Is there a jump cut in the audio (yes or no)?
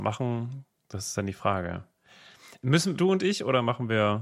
yes